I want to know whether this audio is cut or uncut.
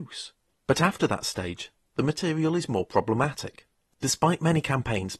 cut